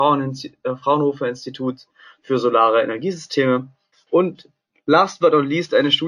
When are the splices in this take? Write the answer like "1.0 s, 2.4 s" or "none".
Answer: 3.9 s